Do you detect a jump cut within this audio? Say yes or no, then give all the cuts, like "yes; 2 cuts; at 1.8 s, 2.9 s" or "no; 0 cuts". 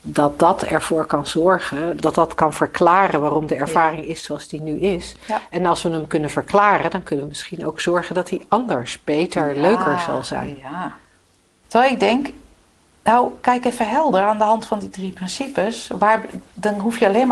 yes; 2 cuts; at 2.0 s, 11.6 s